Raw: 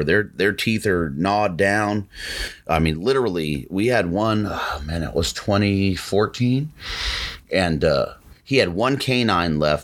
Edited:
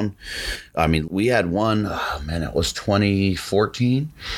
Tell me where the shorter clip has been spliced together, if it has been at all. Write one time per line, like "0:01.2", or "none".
0:01.1